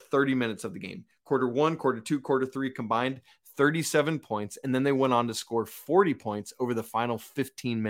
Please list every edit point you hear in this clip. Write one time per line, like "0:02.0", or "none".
none

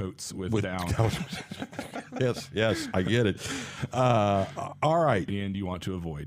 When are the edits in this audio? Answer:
0:05.3

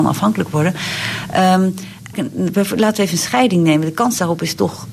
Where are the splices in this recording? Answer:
0:02.1

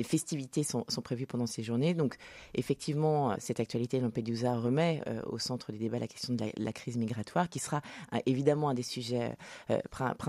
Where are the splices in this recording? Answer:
0:03.3

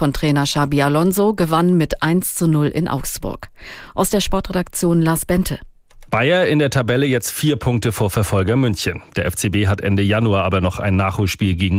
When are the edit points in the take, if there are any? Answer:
0:06.1

